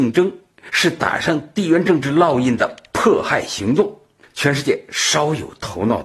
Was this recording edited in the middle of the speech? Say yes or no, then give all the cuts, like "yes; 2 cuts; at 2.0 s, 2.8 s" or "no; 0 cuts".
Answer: no; 0 cuts